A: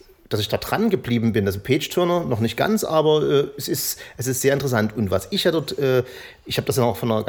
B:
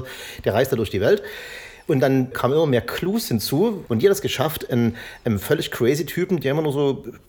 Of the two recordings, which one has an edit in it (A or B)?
B